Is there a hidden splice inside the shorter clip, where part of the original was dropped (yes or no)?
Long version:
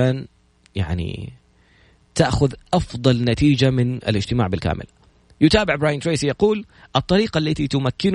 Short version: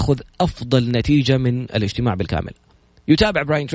no